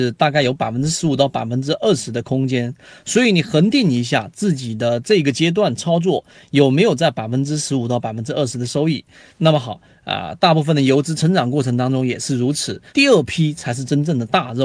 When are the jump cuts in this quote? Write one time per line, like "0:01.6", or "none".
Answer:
0:09.3
0:12.9

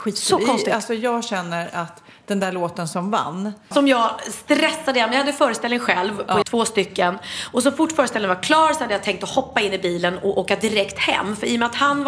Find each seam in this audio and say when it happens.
0:03.7
0:06.4

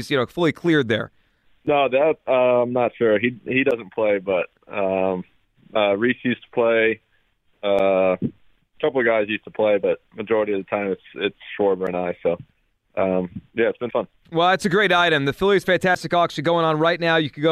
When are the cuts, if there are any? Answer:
none

